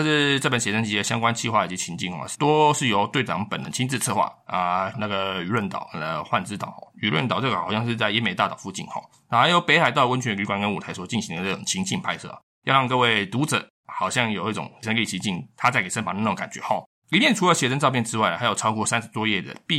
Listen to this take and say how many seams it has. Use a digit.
1